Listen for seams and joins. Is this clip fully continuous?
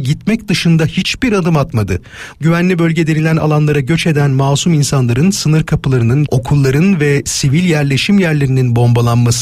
no; 2 cuts; at 2.3 s, 6.3 s

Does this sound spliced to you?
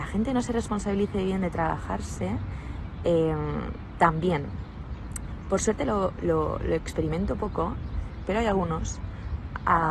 yes; 2 cuts; at 6.2 s, 8.3 s

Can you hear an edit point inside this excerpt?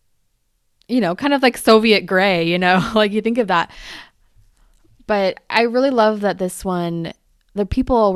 no; 0 cuts

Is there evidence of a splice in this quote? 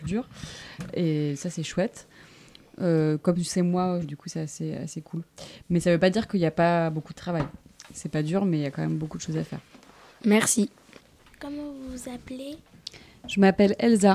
yes; 1 cut; at 4.0 s

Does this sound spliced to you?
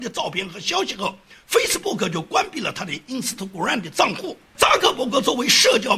yes; 1 cut; at 4.5 s

